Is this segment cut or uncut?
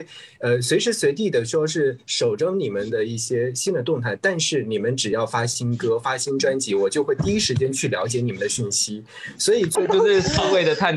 cut